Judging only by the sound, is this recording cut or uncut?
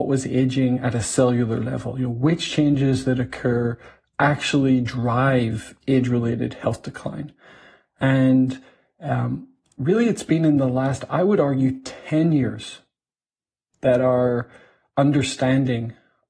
uncut